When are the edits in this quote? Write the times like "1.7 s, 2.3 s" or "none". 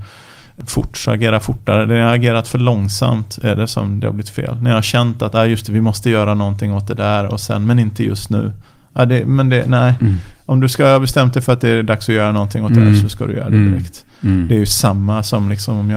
none